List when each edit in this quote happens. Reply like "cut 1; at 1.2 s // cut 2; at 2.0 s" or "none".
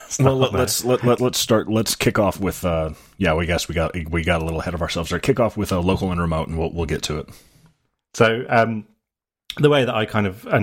cut 1; at 1.2 s